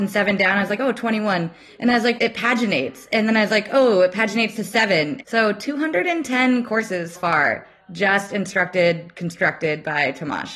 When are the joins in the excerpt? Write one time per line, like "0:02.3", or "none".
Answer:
0:02.2
0:05.2
0:07.1